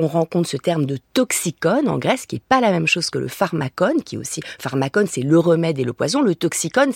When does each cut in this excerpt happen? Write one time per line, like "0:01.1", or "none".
none